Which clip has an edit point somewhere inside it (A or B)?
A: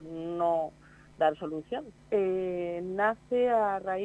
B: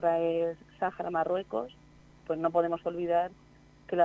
A